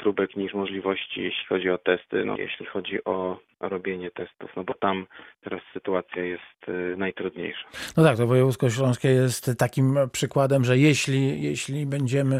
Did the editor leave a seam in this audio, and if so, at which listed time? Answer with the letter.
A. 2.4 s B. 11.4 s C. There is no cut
A